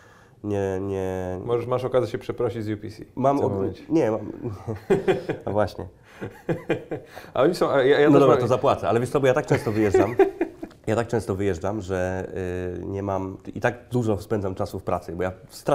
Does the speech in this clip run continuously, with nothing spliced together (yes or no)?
yes